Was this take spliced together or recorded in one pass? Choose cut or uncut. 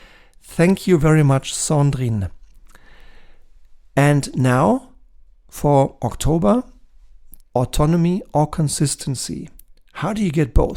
cut